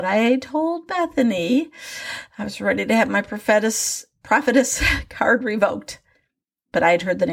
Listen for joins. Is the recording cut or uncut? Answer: uncut